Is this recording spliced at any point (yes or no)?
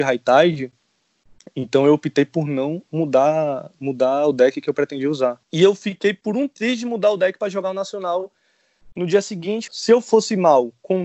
yes